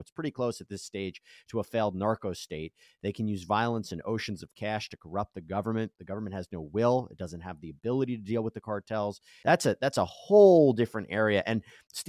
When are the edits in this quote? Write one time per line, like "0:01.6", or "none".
0:09.4

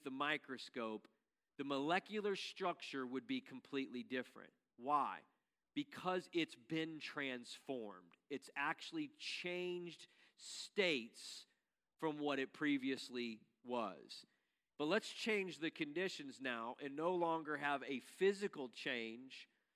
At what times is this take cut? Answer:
0:14.7

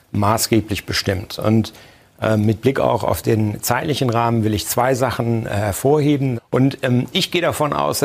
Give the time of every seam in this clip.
0:06.4

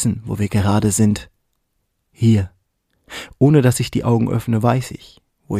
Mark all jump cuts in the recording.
none

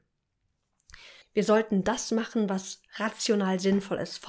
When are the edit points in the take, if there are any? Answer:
0:01.2

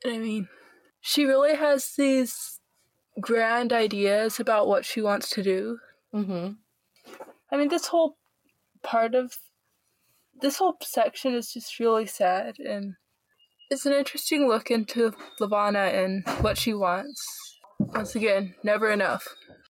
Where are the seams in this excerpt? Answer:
none

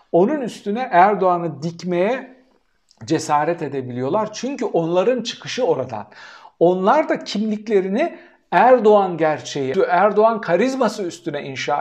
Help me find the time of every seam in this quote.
0:09.7

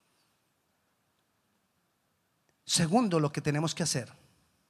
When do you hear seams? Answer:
none

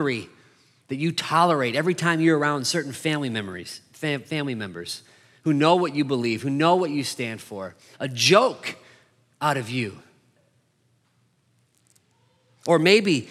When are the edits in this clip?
0:07.9

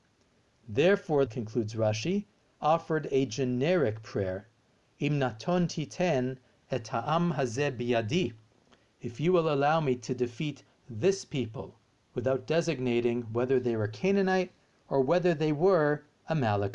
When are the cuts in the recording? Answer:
0:01.3

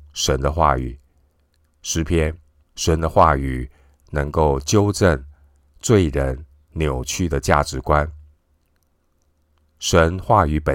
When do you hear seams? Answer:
0:02.6

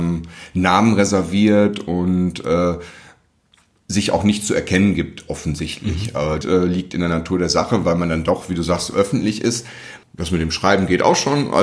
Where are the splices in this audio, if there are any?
0:06.4
0:10.0

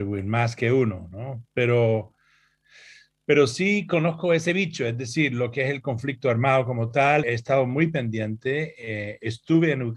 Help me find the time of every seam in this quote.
0:07.2

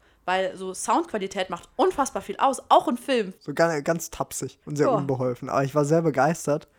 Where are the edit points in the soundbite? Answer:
0:03.4
0:04.6

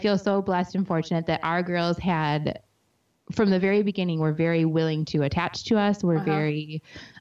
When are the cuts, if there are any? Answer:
none

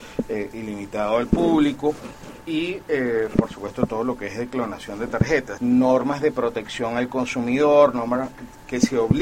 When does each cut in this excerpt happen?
0:05.6

